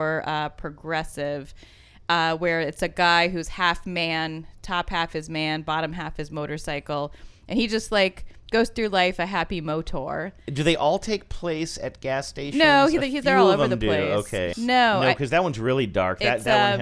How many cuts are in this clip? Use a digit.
1